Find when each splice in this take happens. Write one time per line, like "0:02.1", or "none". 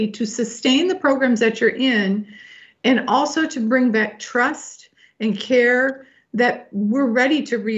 none